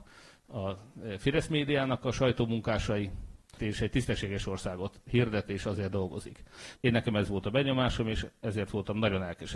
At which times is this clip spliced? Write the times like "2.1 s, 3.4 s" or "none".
3.6 s, 6.7 s